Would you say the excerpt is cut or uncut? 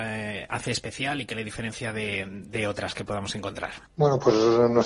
cut